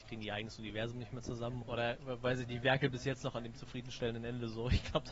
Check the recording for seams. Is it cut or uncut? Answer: cut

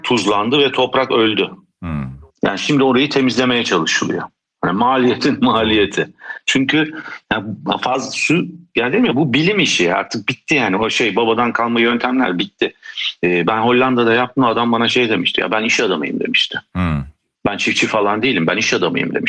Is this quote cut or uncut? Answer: uncut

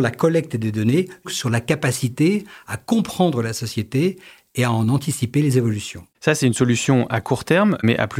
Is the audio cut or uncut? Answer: cut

